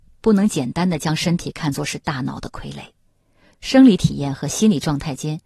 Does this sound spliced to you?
yes; 1 cut; at 3.5 s

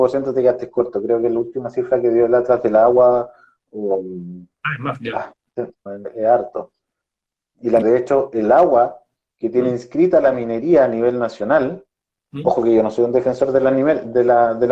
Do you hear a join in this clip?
yes; 2 cuts; at 5.9 s, 7.8 s

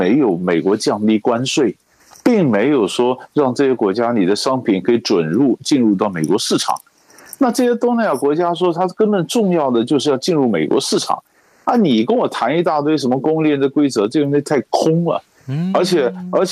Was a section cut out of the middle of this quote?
no; 0 cuts

